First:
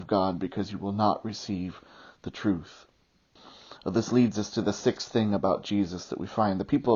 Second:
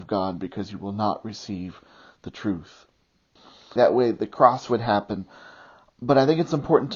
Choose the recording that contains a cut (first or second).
second